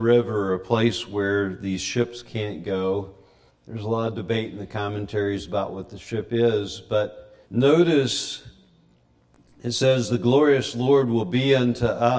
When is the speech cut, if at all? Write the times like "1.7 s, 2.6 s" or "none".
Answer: 3.5 s, 7.4 s

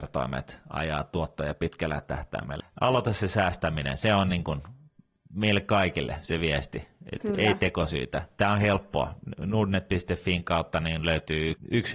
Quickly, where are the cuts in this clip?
2.6 s

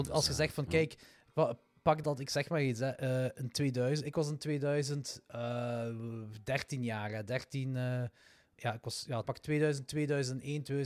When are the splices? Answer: 2.0 s, 9.2 s

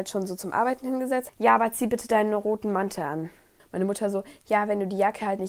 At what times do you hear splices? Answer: 1.3 s, 3.6 s

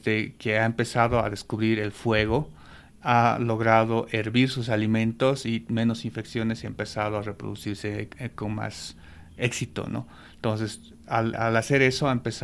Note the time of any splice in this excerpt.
11.3 s

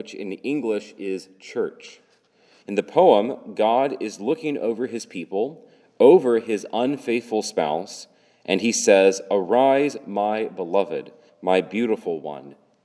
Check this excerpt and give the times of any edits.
2.6 s, 11.3 s

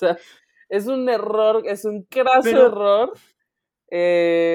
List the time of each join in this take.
none

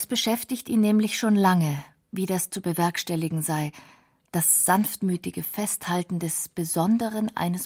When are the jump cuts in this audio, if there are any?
none

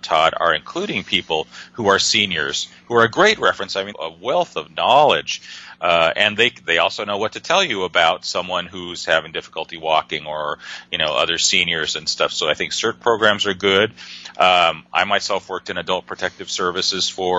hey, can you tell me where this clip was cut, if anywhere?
3.9 s

